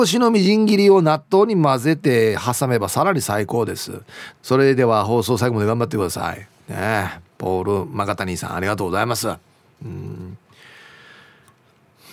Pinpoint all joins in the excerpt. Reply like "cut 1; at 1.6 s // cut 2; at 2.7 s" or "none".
cut 1; at 4.3 s